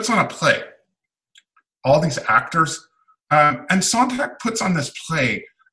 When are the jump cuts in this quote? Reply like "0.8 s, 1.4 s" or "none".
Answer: 1.8 s, 3.2 s

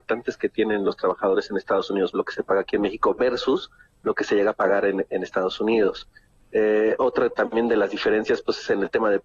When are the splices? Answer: 2.1 s

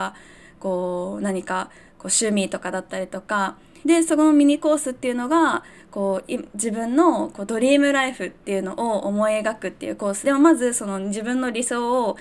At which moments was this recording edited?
3.8 s, 10.2 s

